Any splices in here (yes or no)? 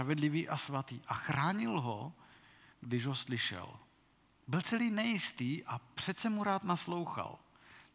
no